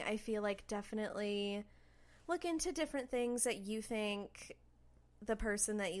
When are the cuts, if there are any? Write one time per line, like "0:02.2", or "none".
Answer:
none